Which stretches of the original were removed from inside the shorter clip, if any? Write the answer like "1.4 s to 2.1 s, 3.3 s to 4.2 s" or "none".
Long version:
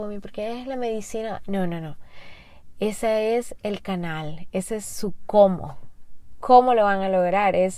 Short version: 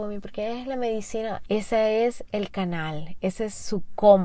1.5 s to 2.8 s